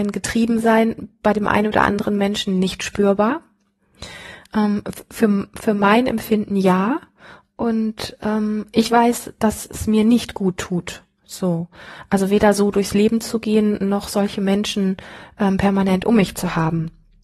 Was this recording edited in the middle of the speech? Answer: no; 0 cuts

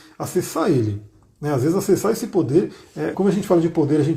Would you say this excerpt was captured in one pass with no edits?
no; 1 cut; at 3.1 s

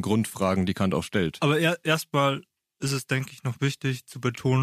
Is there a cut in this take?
no; 0 cuts

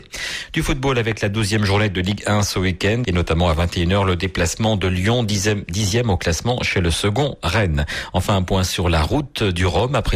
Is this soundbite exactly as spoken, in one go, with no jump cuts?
no; 1 cut; at 3.0 s

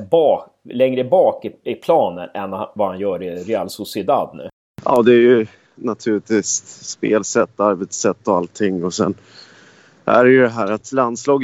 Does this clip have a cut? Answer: no; 0 cuts

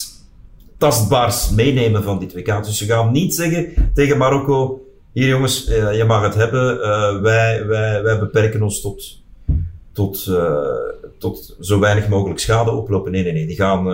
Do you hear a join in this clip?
no; 0 cuts

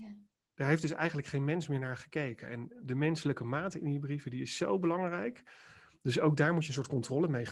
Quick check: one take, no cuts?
yes; 0 cuts

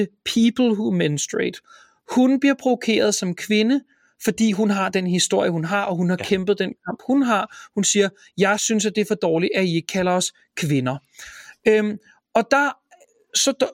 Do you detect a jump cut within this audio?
no; 0 cuts

